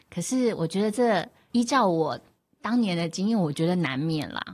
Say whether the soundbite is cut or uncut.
uncut